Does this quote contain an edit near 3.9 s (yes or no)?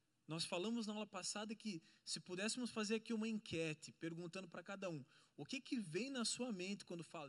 no